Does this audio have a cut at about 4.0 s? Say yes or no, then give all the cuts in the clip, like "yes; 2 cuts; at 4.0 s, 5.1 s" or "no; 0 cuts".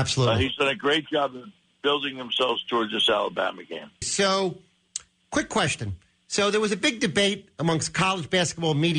yes; 1 cut; at 4.0 s